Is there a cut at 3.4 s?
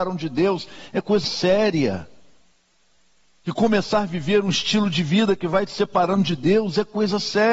no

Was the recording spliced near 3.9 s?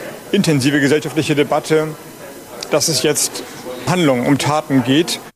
yes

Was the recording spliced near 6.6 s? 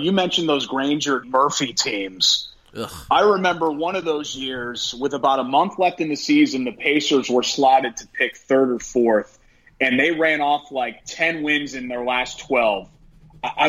no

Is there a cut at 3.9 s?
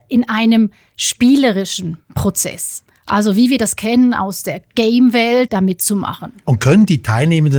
no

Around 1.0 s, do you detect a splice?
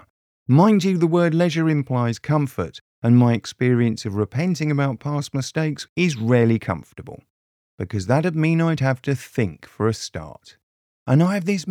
no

